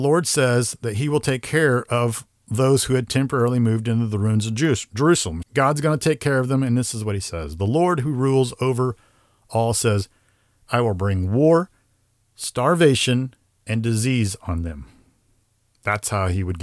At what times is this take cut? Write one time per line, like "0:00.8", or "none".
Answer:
0:05.4

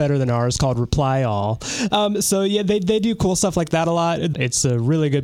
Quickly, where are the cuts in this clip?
0:01.9
0:04.3

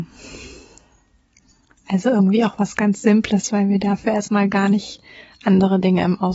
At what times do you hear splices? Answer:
none

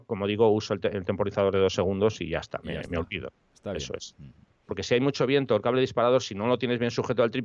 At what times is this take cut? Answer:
0:04.7

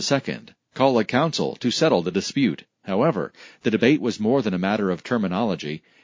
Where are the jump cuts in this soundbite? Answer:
0:02.8

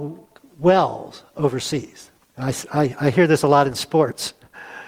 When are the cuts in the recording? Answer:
0:02.3

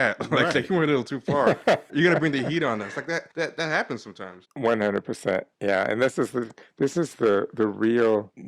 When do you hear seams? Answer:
0:01.9

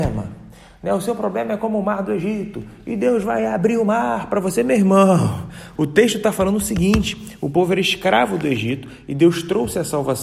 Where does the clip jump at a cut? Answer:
0:05.8

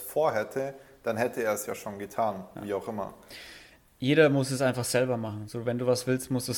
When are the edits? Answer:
0:02.6

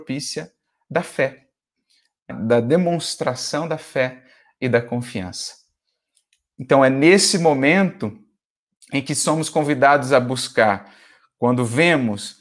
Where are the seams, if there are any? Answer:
0:02.3

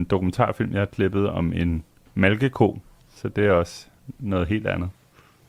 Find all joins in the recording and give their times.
0:03.2

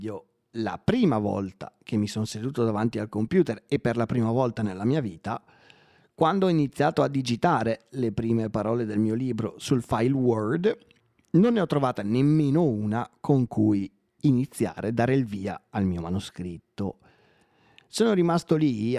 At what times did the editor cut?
none

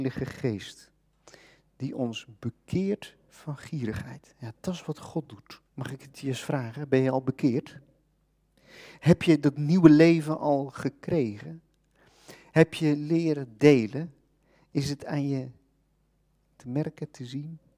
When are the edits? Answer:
0:05.7

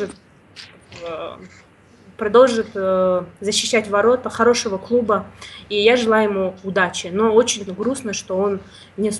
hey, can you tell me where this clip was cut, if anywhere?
0:07.7

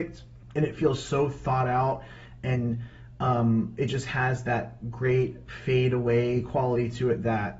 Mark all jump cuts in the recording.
none

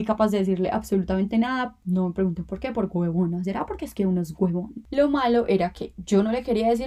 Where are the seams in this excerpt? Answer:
none

